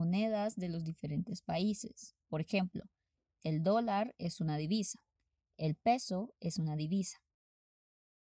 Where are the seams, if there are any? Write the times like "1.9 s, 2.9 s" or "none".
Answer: none